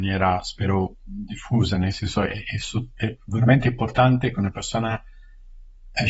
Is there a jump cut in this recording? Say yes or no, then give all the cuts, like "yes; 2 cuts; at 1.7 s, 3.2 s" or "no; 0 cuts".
no; 0 cuts